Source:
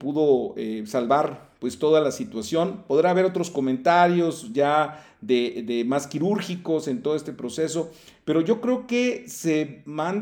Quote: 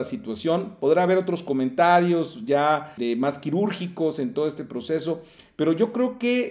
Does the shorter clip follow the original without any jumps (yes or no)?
no